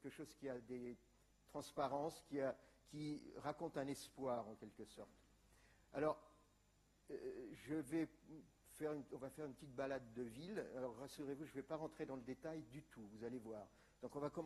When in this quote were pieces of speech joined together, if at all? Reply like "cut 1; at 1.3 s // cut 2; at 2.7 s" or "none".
none